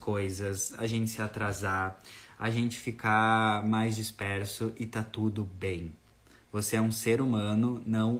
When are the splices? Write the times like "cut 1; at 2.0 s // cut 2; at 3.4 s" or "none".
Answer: none